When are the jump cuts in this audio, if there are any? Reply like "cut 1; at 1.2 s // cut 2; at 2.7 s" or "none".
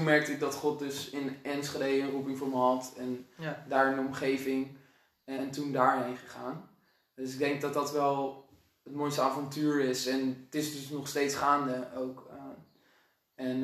cut 1; at 5.4 s